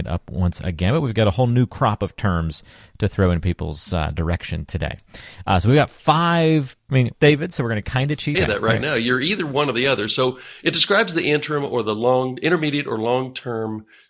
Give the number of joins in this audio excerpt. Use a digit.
2